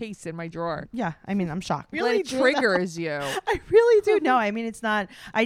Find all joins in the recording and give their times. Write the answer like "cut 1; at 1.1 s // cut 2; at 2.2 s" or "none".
cut 1; at 1.9 s